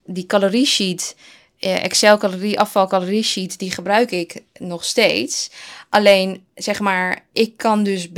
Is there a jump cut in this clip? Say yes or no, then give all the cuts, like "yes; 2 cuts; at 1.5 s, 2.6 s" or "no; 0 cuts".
no; 0 cuts